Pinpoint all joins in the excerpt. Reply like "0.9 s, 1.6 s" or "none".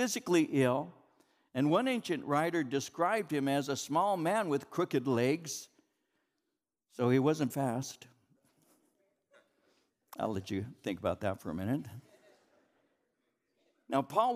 7.5 s